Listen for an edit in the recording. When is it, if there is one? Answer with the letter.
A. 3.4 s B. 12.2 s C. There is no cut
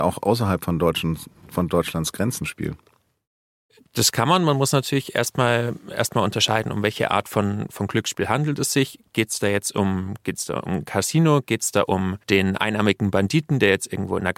B